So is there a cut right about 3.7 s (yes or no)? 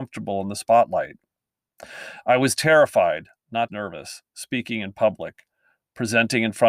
yes